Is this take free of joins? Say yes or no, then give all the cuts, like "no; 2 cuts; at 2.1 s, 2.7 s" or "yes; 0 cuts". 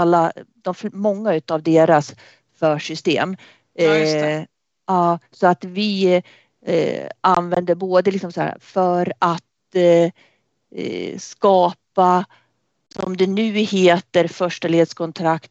yes; 0 cuts